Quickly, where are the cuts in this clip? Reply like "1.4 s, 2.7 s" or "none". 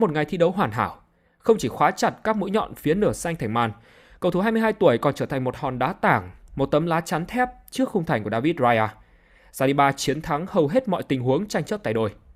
none